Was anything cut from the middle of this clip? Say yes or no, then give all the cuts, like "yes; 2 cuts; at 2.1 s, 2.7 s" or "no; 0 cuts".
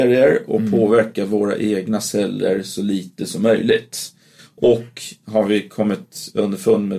no; 0 cuts